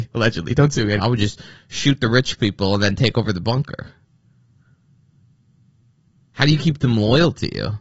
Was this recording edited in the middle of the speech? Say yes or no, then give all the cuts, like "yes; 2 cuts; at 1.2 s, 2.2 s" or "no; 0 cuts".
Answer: yes; 1 cut; at 1.0 s